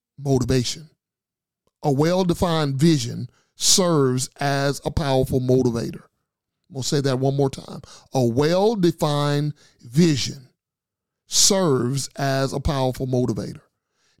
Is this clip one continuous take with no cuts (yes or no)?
yes